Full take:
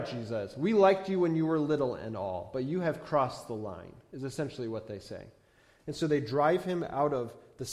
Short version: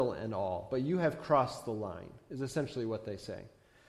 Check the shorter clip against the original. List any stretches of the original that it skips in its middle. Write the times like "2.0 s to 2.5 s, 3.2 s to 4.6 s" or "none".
none

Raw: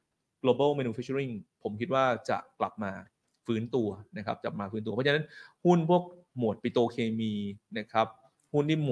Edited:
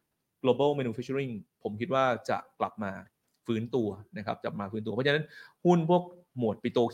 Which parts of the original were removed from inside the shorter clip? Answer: none

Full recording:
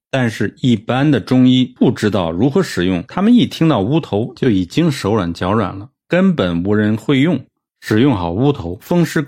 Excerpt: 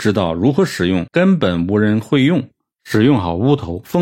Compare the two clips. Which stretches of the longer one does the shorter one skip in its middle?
3.1 s to 6.0 s

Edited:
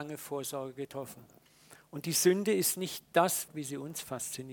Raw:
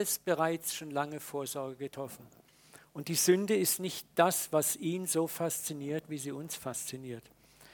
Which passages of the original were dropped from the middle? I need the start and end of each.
4.5 s to 6.0 s

